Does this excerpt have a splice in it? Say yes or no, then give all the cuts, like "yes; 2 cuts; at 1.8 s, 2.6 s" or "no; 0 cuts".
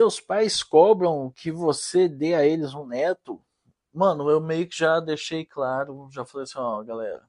no; 0 cuts